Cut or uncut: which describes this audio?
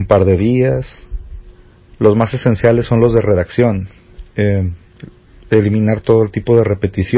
cut